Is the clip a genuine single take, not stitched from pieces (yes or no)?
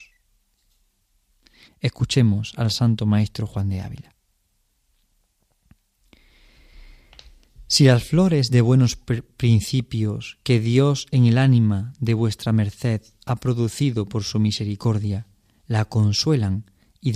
no